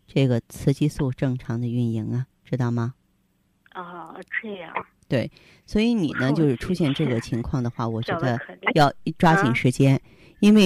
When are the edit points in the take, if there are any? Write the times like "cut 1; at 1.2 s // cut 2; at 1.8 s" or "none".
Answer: cut 1; at 5.0 s